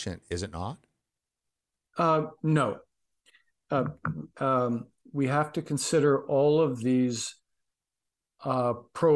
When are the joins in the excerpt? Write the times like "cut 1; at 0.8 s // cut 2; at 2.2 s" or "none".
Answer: none